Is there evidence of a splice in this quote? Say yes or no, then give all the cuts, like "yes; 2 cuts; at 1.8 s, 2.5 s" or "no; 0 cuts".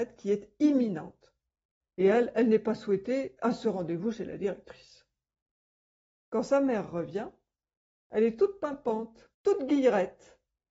yes; 2 cuts; at 1.8 s, 9.3 s